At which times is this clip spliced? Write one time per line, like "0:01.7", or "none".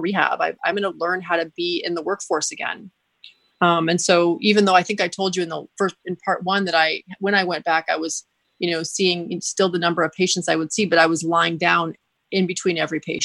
none